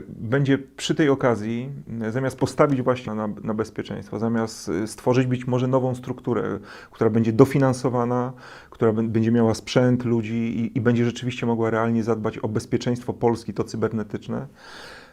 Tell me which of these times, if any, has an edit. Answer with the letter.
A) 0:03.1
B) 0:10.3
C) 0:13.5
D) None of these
A